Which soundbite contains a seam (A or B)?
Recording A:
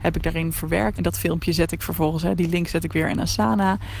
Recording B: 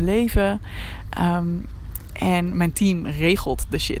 A